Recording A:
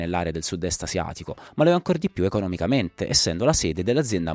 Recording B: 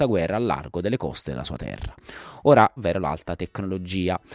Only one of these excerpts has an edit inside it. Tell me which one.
B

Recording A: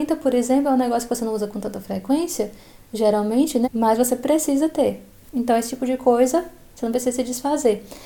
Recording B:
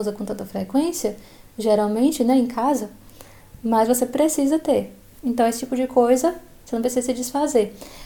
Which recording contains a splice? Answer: A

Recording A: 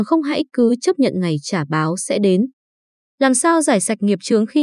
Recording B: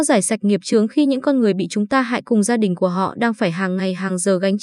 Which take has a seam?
A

